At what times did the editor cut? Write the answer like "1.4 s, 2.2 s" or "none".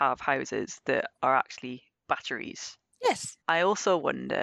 3.4 s

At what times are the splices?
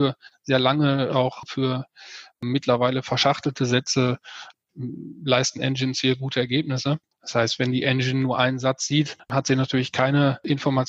7.1 s

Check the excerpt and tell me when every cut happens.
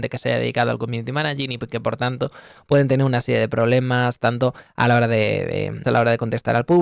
5.8 s

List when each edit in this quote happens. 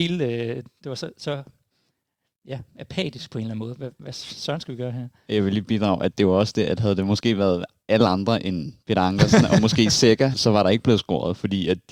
10.3 s

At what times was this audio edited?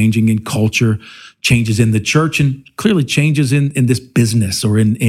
none

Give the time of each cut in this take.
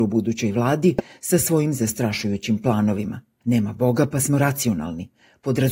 3.4 s

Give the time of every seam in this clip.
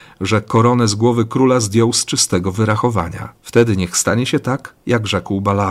3.4 s

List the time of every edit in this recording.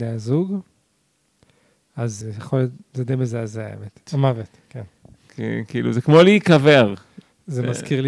2.2 s, 4.1 s

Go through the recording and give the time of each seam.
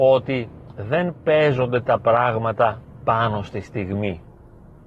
none

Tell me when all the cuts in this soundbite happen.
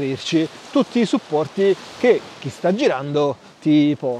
none

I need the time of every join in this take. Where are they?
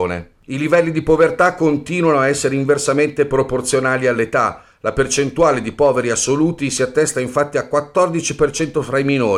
none

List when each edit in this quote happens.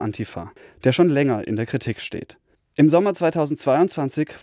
none

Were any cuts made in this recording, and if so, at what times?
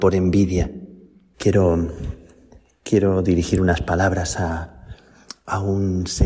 1.3 s

